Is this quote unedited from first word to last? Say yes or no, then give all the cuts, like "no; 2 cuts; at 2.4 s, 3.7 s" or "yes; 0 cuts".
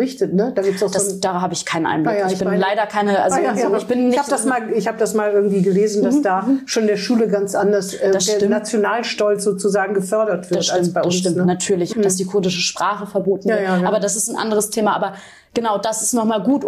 no; 1 cut; at 11.9 s